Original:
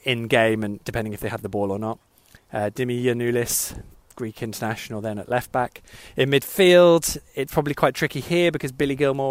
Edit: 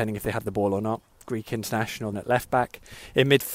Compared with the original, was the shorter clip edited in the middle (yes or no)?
yes